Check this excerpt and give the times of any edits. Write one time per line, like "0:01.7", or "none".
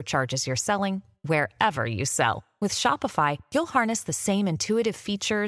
none